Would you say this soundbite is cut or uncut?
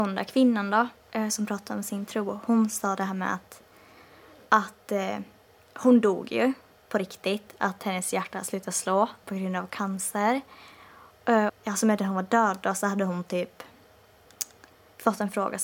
cut